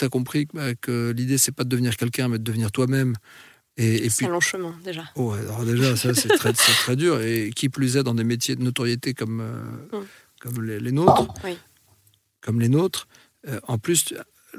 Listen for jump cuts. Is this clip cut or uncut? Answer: uncut